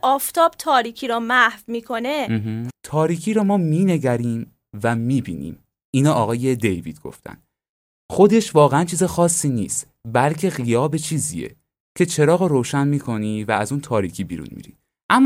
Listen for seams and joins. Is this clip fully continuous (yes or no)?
no